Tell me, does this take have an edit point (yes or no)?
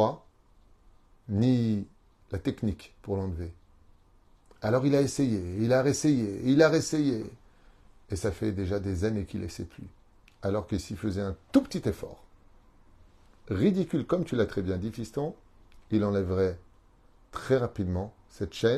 no